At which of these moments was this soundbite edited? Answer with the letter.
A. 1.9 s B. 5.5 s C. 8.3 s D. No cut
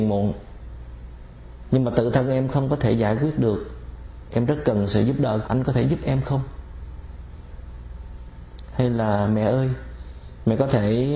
B